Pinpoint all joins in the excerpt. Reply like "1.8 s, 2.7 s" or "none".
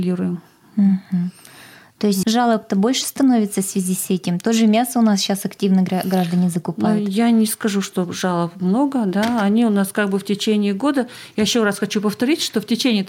2.2 s